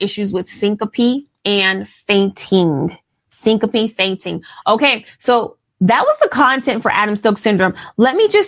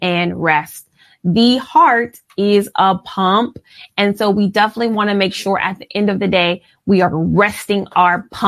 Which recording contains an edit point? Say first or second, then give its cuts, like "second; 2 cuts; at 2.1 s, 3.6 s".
first; 2 cuts; at 1.4 s, 4.6 s